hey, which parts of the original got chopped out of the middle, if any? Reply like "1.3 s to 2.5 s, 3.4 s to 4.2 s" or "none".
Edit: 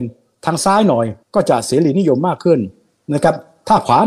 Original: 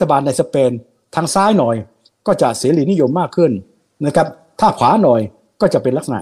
1.9 s to 2.1 s